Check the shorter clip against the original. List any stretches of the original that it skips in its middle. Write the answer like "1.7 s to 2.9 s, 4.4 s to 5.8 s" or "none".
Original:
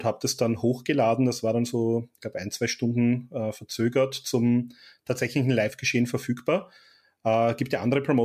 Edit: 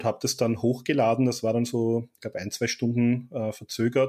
none